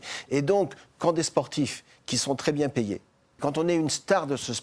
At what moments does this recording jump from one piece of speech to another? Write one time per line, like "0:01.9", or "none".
0:03.4